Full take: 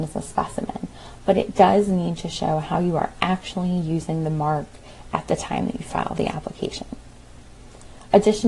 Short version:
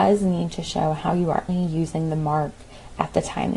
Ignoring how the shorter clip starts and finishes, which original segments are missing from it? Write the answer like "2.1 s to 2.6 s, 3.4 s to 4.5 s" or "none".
3.1 s to 3.6 s